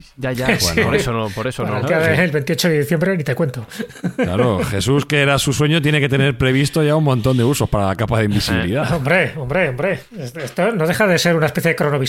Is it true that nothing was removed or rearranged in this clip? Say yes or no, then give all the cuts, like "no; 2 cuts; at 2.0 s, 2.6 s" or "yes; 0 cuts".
yes; 0 cuts